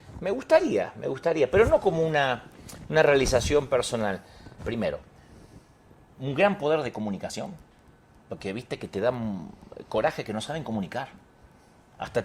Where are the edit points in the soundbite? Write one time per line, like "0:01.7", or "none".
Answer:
0:04.6